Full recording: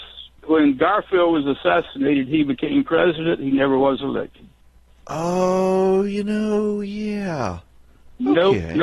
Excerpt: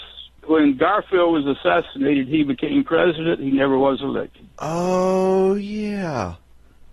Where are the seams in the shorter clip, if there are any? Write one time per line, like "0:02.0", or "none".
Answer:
0:04.5
0:05.6